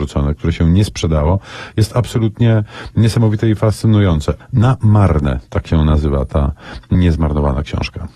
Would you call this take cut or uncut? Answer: cut